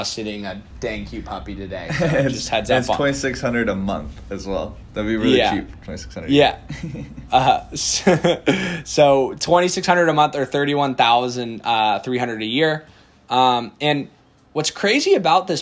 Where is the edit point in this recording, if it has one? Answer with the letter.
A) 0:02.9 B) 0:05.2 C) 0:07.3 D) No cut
D